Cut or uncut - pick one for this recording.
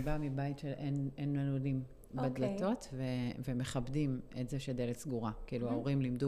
uncut